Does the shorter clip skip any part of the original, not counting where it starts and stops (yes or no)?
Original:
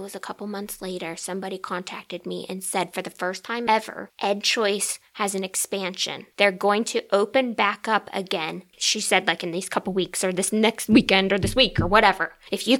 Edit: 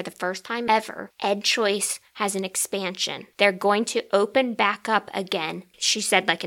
no